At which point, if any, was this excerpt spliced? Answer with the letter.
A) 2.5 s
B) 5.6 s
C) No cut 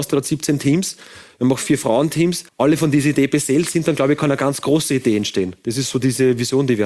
A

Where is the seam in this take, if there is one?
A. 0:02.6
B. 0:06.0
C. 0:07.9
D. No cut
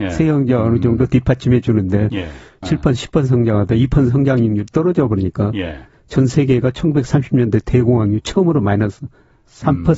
A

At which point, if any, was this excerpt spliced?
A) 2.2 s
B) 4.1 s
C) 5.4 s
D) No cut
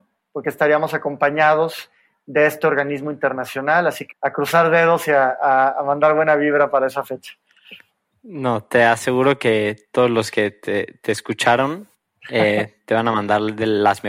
B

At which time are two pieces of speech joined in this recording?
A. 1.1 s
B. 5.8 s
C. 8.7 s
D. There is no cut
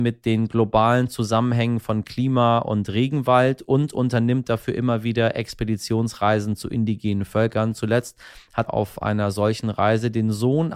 C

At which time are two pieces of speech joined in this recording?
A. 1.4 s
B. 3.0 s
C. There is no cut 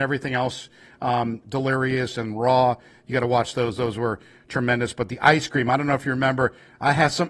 A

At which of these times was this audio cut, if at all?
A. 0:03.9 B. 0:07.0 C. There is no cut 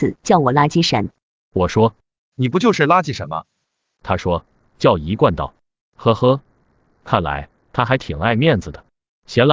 A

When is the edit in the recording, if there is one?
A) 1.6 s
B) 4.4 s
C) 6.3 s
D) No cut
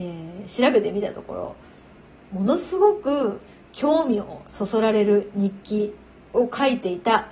D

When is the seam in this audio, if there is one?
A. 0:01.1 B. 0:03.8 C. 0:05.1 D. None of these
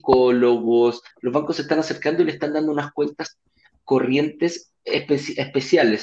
A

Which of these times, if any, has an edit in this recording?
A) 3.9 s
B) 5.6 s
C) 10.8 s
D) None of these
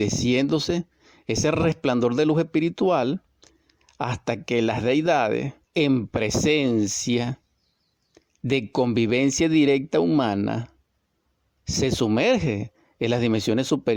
B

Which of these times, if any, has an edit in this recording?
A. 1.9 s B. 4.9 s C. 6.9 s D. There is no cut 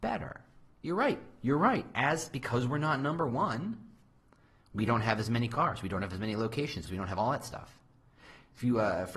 C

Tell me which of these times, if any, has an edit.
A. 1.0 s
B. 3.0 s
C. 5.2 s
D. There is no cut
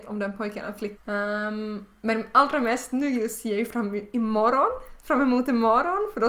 A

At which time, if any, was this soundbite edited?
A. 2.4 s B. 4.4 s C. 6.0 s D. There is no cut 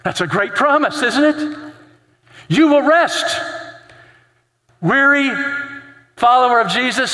D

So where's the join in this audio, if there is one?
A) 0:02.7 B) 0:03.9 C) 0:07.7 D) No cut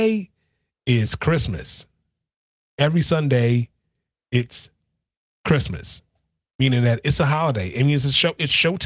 A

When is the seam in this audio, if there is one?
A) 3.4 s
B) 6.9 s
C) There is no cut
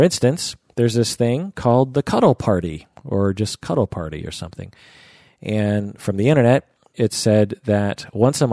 B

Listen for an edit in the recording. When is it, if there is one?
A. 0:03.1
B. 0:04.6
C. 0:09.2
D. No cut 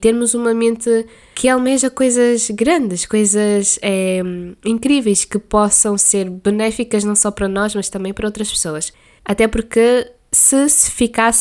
C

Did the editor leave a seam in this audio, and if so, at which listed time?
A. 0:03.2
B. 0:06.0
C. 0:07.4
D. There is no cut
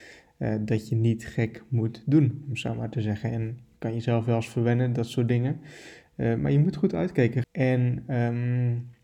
C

